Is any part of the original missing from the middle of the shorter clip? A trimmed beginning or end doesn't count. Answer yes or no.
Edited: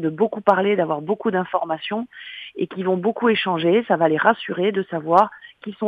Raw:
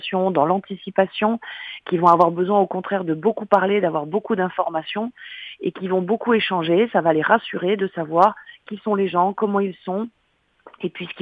no